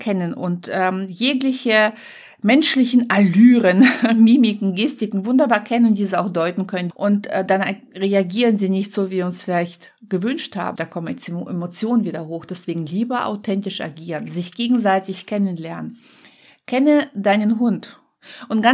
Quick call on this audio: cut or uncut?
cut